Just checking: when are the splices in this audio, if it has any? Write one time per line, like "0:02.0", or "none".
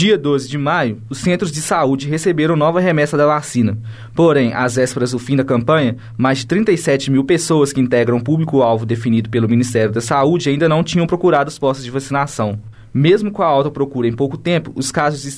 none